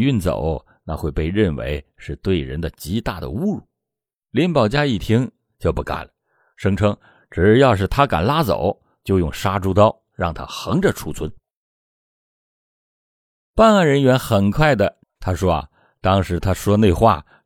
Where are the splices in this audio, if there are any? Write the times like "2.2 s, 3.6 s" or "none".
15.0 s